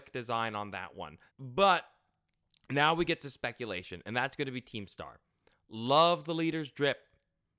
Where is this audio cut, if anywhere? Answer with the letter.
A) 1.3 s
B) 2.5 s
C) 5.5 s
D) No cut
A